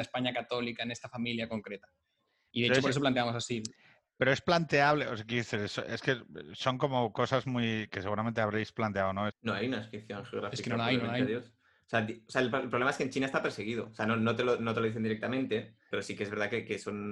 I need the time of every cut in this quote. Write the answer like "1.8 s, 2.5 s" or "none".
9.3 s, 15.9 s